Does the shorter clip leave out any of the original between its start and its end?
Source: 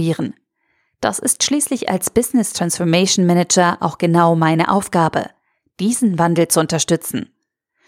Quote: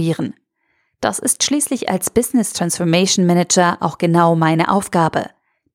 no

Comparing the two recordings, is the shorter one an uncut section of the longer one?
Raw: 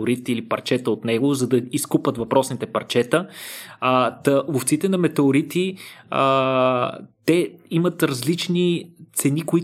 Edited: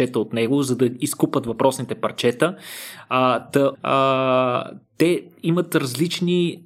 no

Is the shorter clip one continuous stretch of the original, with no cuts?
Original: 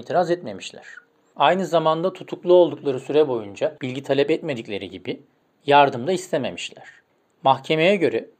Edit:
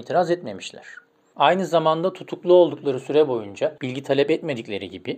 yes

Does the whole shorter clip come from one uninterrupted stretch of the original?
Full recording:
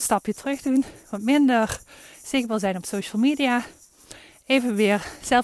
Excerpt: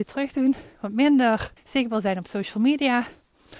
no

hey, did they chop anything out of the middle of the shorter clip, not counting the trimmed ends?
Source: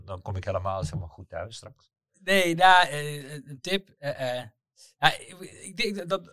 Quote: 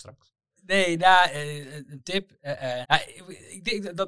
yes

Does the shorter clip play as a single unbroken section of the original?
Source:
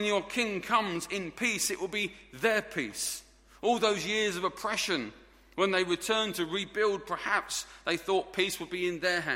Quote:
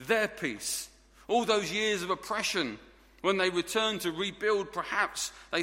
yes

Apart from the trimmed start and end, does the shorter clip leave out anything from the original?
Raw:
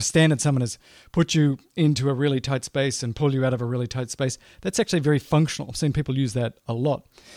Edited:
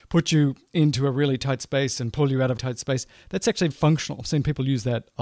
yes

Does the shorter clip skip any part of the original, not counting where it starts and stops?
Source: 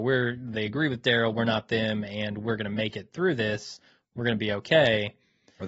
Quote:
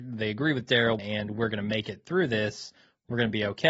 yes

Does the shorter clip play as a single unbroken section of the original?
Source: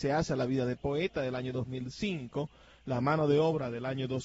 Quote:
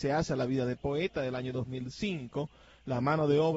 yes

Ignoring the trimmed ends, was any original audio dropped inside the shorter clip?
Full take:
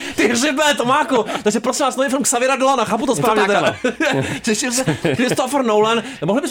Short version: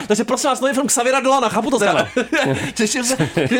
yes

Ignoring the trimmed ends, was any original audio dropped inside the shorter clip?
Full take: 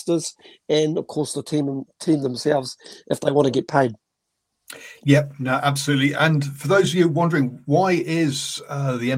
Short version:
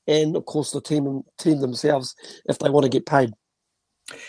no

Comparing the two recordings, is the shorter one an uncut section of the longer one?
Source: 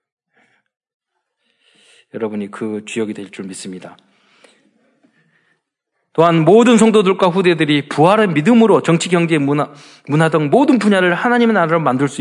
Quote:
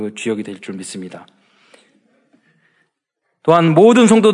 yes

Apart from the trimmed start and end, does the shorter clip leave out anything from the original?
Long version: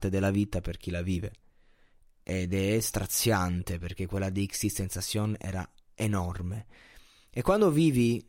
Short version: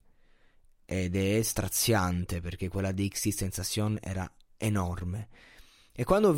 no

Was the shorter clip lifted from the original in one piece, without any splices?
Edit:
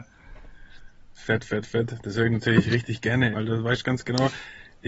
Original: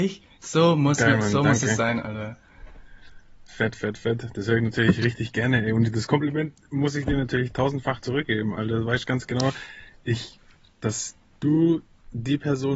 no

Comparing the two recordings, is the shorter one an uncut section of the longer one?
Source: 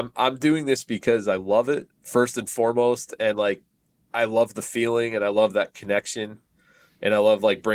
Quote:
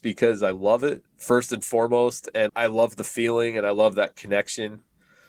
no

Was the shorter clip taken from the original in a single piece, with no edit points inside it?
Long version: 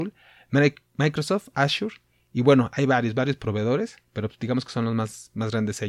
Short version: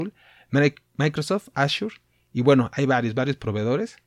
yes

